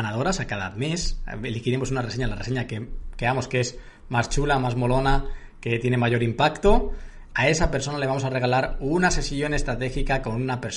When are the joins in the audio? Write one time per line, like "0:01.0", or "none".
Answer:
none